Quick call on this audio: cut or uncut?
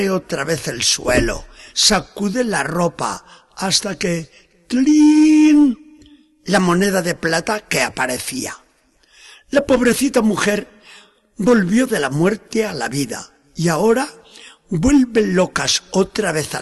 cut